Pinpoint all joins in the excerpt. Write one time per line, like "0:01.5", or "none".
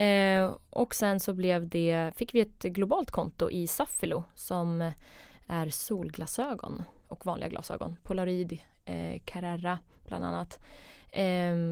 0:07.0